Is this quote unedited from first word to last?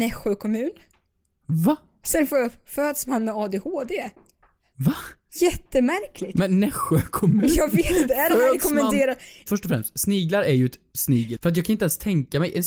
no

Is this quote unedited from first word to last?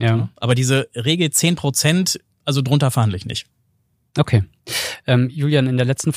yes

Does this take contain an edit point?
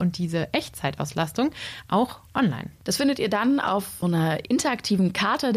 yes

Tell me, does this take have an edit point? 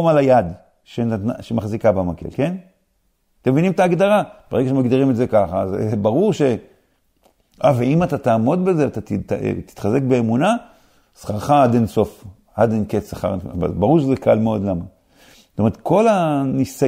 no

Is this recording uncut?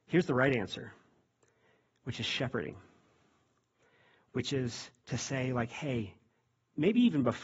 yes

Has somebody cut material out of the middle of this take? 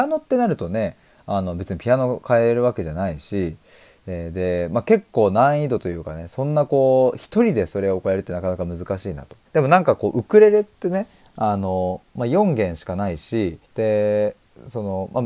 yes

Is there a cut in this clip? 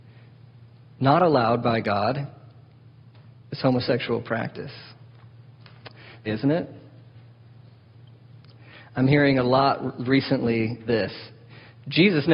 yes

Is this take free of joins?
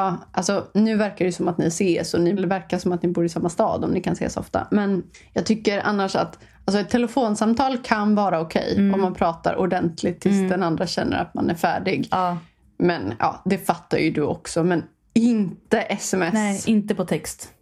yes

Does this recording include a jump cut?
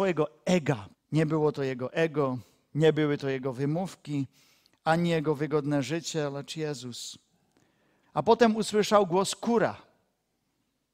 yes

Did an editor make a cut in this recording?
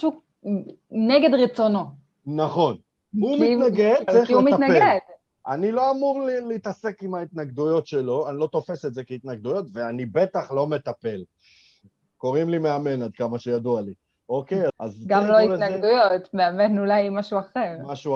yes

